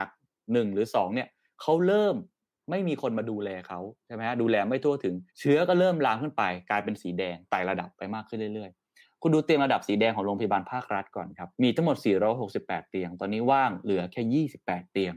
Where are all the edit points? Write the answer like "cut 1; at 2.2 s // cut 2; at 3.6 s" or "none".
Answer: cut 1; at 5.3 s // cut 2; at 11.5 s